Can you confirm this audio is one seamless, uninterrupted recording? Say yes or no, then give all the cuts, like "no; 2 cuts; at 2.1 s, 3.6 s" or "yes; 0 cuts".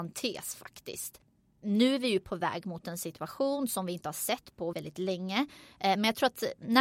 no; 1 cut; at 4.7 s